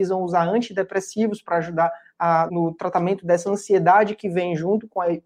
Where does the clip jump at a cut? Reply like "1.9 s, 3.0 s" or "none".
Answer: 2.5 s